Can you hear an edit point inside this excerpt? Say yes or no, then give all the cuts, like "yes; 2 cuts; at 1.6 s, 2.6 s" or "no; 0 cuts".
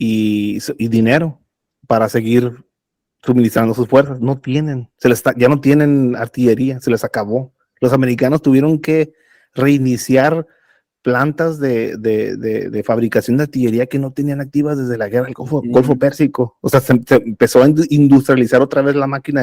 no; 0 cuts